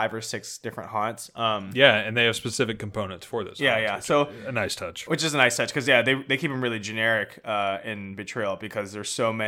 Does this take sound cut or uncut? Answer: uncut